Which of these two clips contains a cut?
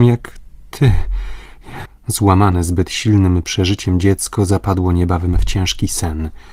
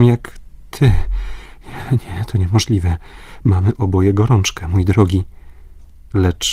first; 1 cut; at 1.9 s

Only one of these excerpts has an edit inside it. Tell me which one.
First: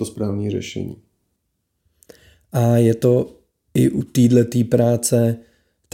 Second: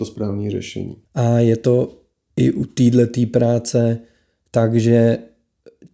second; 1 cut; at 1.0 s

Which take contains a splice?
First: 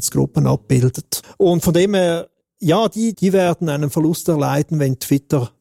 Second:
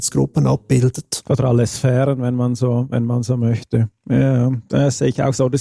first; 2 cuts; at 1.2 s, 3.1 s

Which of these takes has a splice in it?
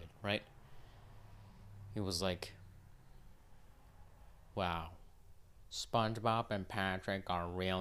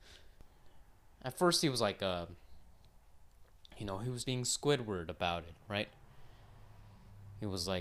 second; 1 cut; at 4.2 s

